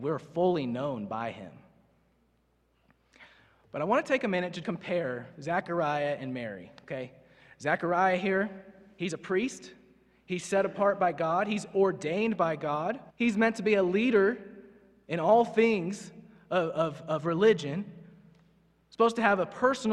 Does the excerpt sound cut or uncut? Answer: cut